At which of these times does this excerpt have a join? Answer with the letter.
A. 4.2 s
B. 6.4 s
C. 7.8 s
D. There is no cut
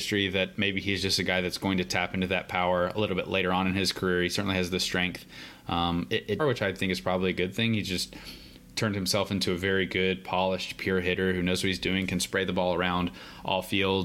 B